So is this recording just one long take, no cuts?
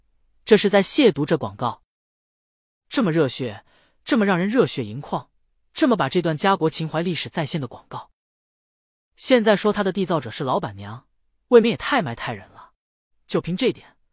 no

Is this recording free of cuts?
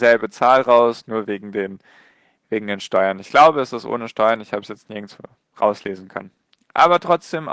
yes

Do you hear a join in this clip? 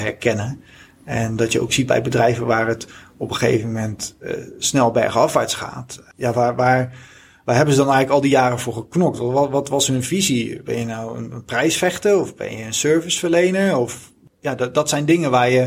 no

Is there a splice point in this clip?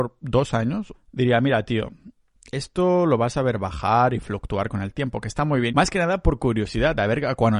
yes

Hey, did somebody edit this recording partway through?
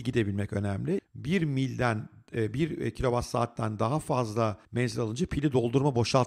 yes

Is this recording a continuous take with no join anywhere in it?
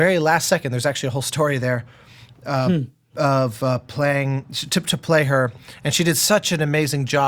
yes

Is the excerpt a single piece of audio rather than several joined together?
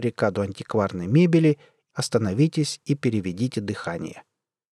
no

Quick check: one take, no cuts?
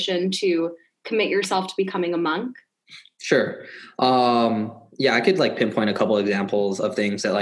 yes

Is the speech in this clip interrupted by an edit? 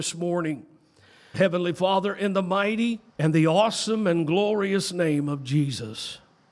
yes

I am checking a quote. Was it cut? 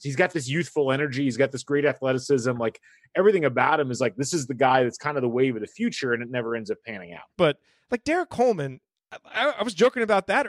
yes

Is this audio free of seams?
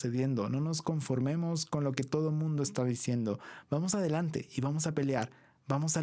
yes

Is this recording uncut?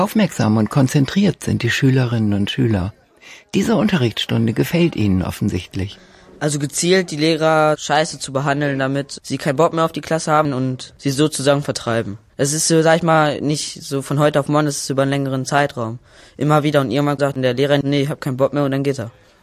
yes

